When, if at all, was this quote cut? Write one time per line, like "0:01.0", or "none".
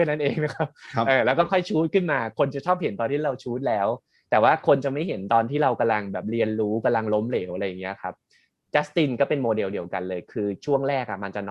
none